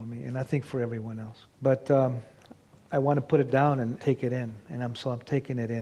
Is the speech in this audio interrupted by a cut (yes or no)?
yes